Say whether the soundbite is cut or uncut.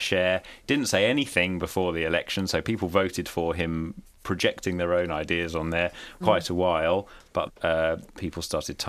cut